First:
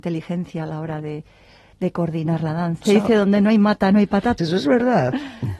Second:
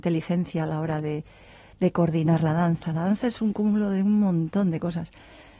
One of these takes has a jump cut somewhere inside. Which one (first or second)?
first